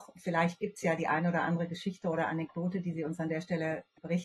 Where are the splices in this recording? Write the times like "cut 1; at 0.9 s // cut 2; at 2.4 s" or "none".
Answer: none